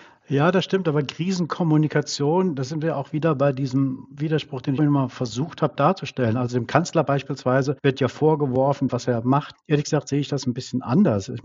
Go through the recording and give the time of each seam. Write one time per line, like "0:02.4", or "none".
0:04.8
0:08.9